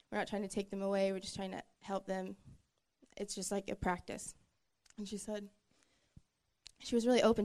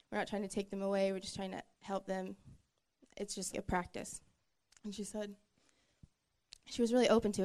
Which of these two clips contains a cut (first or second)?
second